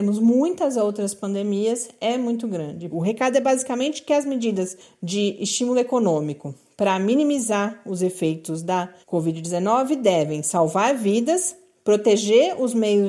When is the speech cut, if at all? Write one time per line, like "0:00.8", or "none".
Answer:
0:02.9
0:09.0